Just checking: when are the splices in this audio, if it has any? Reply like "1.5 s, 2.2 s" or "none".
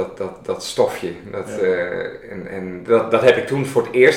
none